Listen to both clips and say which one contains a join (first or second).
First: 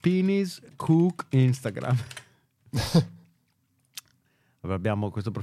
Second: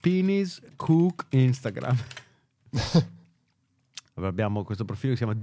second